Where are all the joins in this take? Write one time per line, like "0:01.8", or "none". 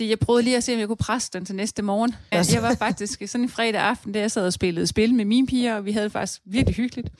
0:02.3